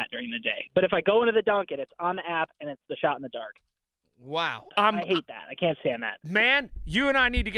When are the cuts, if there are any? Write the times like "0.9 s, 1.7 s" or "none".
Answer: 4.7 s